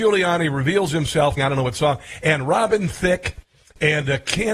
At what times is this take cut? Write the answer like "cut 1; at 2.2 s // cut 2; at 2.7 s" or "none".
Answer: cut 1; at 1.4 s